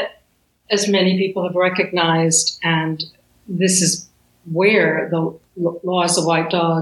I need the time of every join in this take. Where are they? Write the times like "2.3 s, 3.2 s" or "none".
none